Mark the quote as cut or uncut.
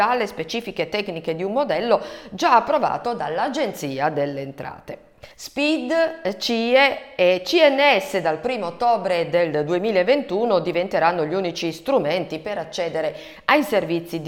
cut